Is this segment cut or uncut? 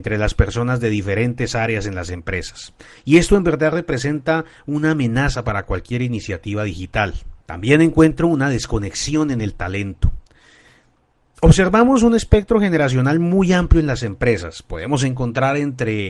cut